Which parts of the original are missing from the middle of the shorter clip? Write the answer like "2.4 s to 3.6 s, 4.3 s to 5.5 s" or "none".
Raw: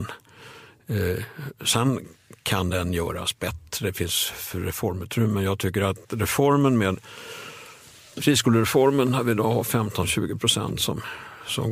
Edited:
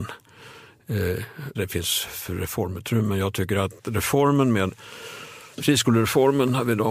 1.5 s to 3.8 s, 7.8 s to 8.1 s

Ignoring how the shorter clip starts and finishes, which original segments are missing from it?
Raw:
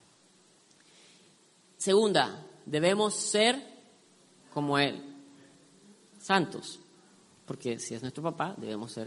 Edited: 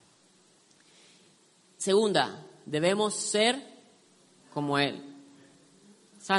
none

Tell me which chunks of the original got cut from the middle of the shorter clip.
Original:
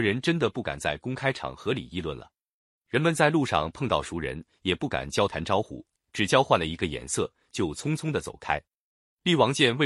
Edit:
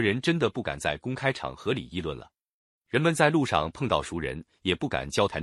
none

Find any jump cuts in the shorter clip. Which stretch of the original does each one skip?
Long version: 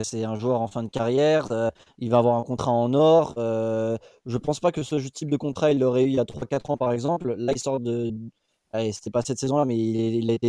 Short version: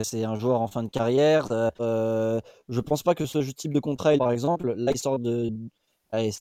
1.8 s to 3.3 s, 5.7 s to 6.8 s

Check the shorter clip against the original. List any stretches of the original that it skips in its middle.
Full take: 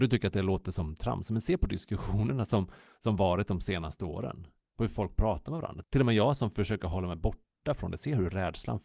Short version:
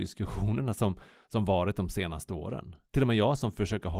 4.6 s to 5.9 s

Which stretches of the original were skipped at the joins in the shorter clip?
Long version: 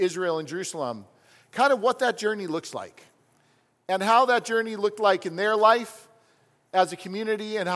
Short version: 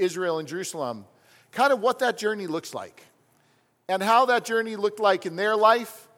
none

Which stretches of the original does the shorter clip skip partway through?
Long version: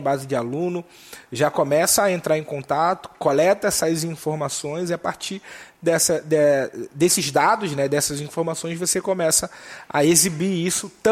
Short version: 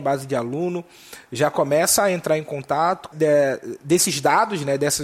3.1 s to 6.2 s

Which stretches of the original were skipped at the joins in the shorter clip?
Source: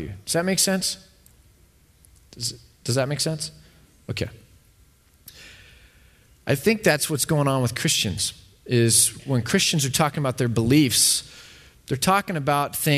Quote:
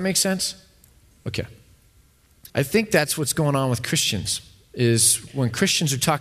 1.5 s to 3.9 s, 5.3 s to 6.4 s

